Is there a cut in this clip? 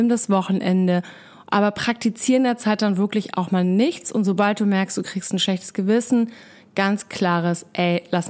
no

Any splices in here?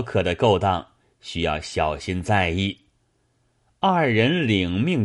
no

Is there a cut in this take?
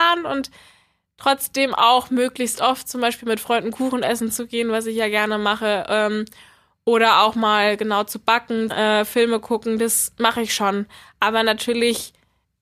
yes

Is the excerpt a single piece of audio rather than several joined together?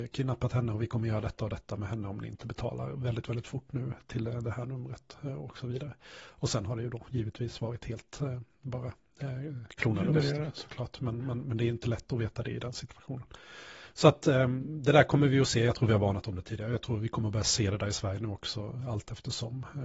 yes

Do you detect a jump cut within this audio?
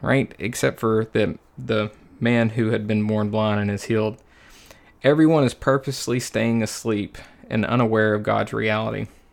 no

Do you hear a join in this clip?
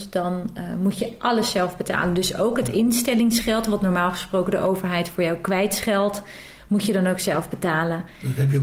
no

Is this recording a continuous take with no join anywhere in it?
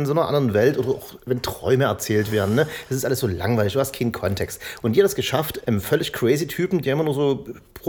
no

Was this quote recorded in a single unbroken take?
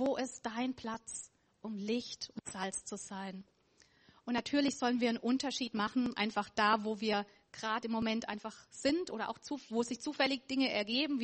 yes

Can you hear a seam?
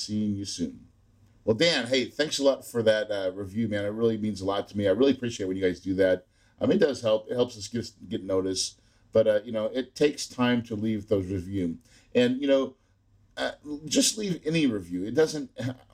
no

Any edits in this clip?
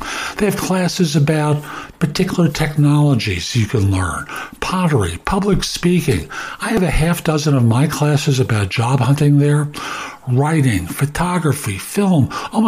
no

